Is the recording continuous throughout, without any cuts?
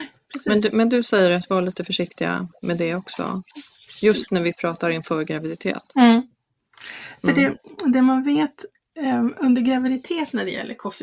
yes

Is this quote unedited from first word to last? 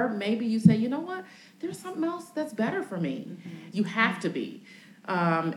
no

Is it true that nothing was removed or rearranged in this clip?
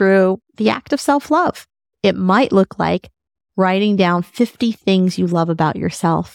no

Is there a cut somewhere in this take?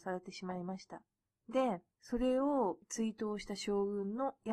no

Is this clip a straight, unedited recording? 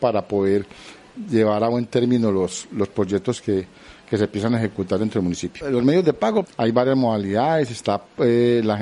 no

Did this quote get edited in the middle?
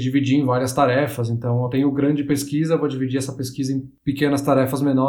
no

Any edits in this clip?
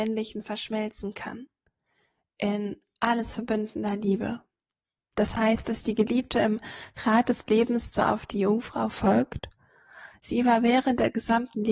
no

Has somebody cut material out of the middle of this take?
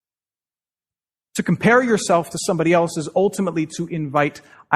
yes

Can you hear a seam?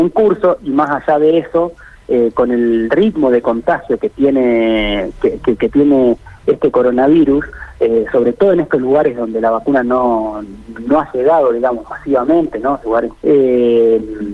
yes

